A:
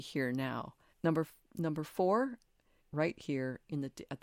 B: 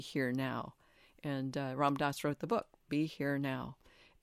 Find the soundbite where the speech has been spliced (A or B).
A